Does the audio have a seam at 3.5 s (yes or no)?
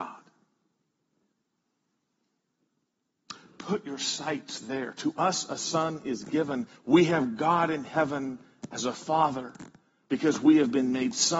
no